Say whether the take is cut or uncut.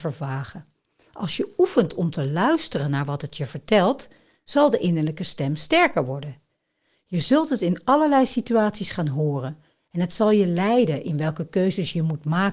uncut